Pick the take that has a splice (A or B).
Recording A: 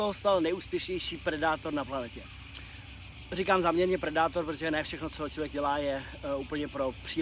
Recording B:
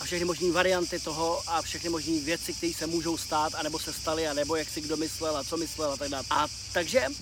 B